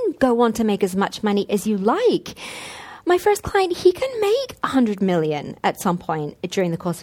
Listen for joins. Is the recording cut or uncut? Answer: uncut